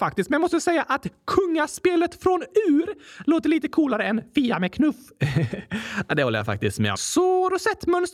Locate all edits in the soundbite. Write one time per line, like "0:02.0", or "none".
0:06.9